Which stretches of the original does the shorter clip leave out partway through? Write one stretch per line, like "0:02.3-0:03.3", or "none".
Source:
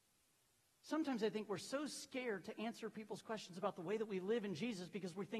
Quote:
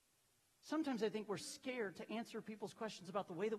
0:01.6-0:01.9